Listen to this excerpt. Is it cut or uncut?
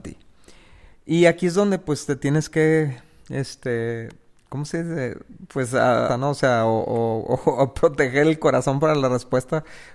cut